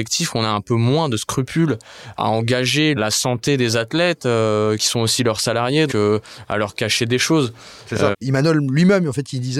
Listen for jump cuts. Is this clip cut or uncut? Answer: cut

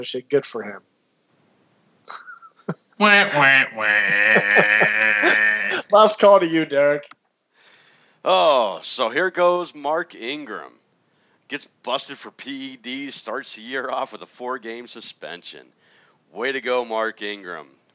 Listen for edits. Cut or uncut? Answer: uncut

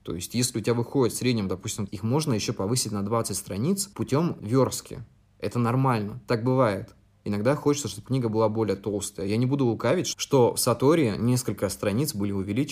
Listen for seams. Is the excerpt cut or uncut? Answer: cut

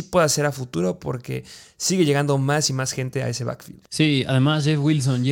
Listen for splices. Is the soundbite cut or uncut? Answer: cut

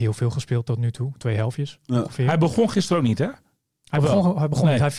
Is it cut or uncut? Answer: uncut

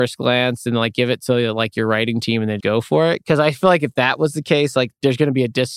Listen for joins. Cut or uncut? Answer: cut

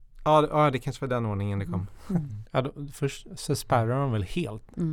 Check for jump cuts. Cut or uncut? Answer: cut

